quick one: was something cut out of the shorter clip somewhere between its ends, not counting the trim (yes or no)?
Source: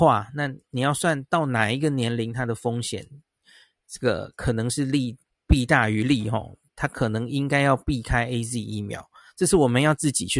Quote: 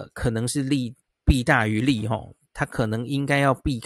no